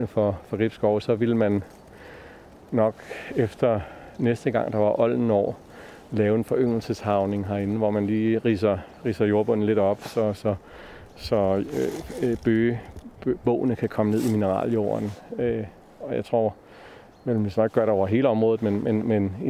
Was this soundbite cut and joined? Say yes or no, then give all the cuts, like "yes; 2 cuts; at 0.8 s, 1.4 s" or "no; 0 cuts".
no; 0 cuts